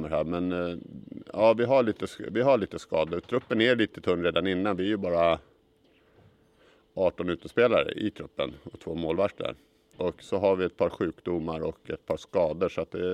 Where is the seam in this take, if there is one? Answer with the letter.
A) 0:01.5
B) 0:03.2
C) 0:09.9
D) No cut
C